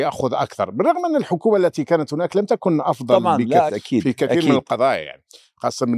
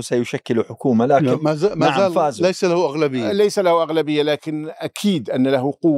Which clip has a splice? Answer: first; 1 cut; at 3.7 s

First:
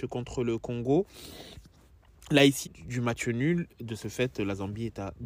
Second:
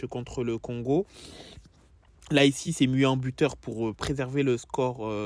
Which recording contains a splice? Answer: first; 1 cut; at 2.6 s

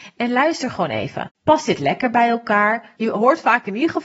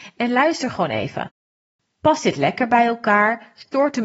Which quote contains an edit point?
first; 2 cuts; at 1.3 s, 3.0 s

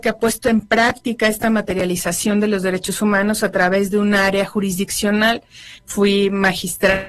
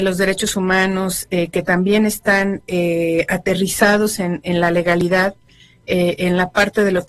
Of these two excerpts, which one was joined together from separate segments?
first; 1 cut; at 5.8 s

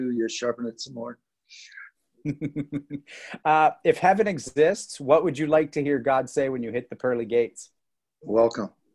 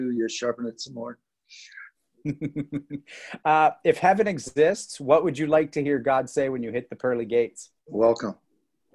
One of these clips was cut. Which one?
second; 1 cut; at 7.8 s

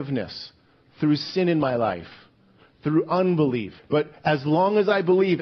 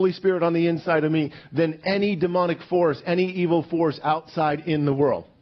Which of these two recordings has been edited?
first; 1 cut; at 3.8 s

